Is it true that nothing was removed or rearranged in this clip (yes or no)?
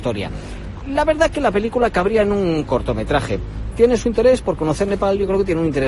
yes